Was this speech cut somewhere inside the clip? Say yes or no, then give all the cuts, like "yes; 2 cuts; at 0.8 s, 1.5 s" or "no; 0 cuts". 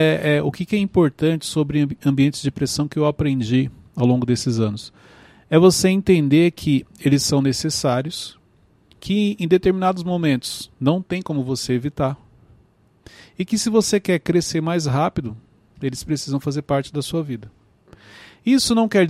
no; 0 cuts